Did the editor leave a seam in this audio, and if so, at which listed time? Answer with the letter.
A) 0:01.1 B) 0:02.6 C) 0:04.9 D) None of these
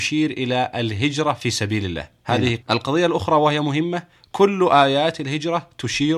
B